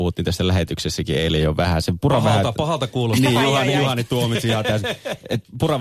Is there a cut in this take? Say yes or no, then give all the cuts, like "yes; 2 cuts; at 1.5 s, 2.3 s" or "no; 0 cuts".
no; 0 cuts